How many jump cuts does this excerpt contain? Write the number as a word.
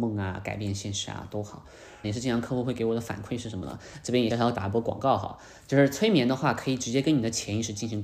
two